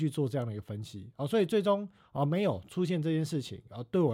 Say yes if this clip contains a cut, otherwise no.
no